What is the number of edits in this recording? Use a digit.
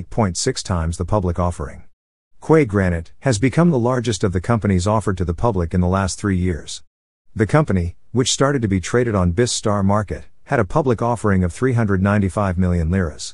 1